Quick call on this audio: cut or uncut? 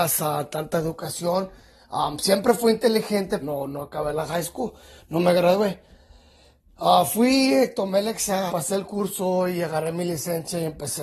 cut